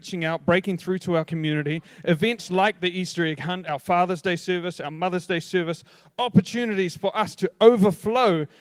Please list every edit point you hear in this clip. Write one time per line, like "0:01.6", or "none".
0:03.6